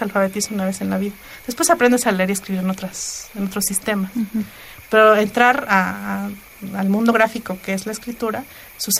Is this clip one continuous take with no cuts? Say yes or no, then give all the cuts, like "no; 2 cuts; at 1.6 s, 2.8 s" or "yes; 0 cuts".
yes; 0 cuts